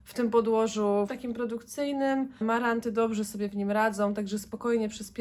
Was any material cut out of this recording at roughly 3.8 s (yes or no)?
no